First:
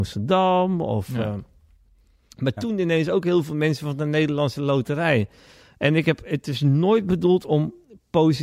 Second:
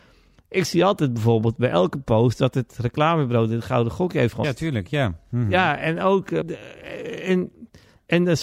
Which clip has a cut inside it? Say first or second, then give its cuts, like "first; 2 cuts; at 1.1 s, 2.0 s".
second; 2 cuts; at 4.4 s, 6.4 s